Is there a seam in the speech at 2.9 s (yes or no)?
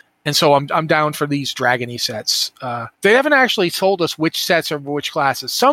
yes